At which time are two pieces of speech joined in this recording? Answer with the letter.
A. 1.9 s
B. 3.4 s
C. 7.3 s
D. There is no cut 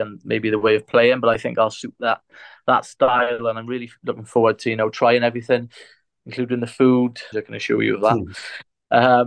C